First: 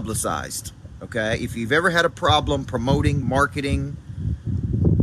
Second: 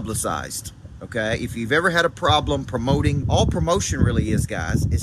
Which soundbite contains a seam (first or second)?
second